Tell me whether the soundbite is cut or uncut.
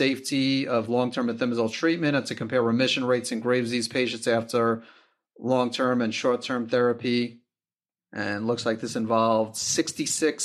uncut